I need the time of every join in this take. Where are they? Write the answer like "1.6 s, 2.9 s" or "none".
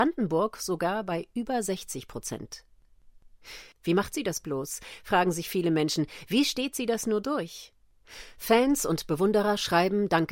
3.7 s